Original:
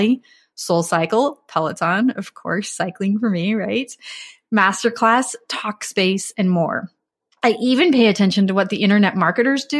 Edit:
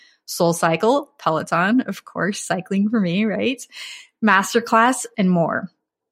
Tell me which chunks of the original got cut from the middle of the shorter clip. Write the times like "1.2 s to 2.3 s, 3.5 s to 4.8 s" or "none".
5.4 s to 6.3 s